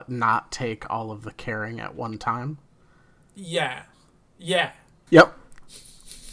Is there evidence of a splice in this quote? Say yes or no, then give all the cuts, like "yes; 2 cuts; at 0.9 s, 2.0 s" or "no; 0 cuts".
yes; 1 cut; at 5.1 s